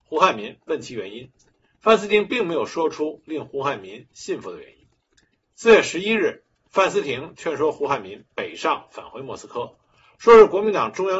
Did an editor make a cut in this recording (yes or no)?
no